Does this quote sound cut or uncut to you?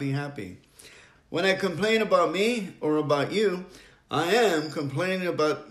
cut